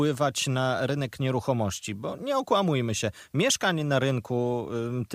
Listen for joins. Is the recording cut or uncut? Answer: uncut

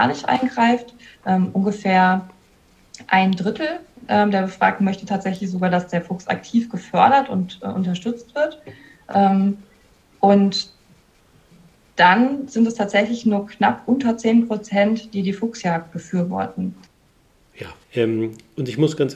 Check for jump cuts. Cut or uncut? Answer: cut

